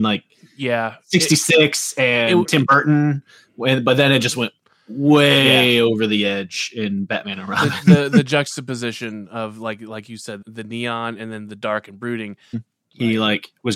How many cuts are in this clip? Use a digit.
2